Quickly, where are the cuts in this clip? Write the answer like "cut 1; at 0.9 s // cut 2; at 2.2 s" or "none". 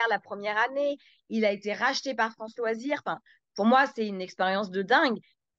none